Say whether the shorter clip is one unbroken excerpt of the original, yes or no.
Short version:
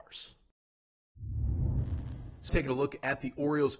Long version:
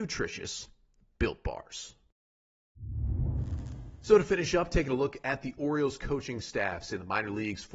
no